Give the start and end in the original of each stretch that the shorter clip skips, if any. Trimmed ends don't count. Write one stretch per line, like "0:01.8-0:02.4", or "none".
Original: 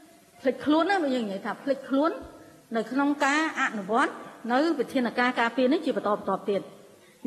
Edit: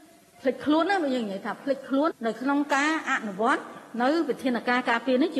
0:02.1-0:02.6